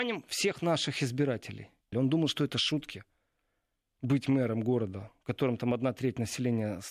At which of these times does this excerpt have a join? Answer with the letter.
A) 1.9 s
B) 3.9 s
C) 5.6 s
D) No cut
A